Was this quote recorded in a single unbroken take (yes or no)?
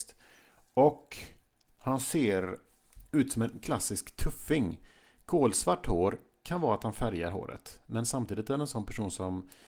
yes